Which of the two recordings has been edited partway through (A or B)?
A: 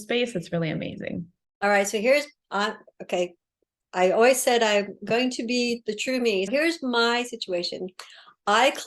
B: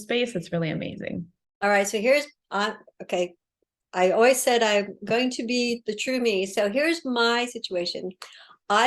A